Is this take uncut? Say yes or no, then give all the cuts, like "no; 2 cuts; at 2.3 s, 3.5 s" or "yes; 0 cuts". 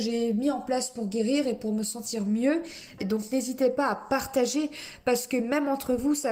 no; 1 cut; at 3.0 s